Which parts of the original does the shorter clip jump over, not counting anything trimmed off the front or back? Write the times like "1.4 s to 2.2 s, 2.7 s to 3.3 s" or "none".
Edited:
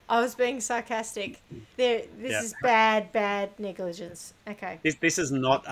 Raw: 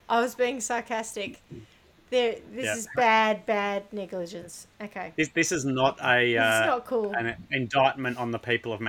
1.7 s to 2.0 s